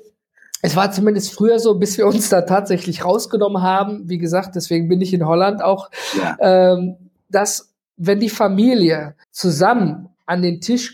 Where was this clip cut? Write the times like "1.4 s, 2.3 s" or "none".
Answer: 9.2 s